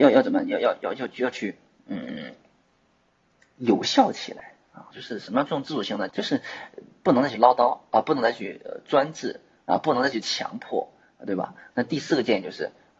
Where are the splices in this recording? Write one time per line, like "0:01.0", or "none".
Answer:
0:04.9
0:06.1
0:11.7